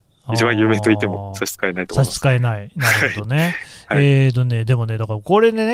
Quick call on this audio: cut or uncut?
uncut